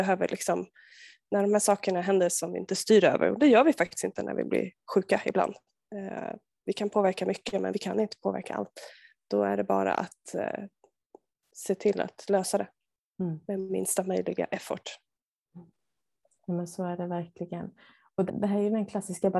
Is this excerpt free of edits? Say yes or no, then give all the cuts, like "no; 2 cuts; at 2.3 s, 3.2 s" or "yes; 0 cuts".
no; 1 cut; at 18.3 s